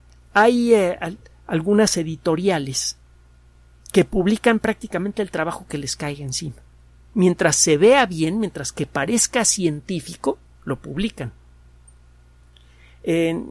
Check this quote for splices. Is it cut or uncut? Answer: uncut